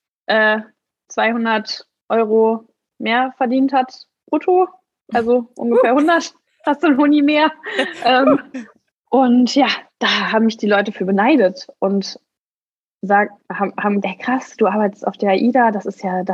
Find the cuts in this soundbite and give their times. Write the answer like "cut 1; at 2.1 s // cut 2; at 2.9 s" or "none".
cut 1; at 8.9 s // cut 2; at 14.0 s